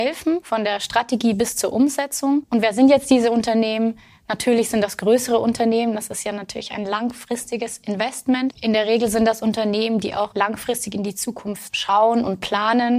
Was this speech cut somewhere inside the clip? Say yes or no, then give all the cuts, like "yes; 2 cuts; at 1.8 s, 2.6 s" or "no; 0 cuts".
no; 0 cuts